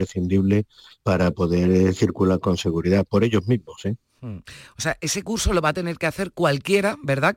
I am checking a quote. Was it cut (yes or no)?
no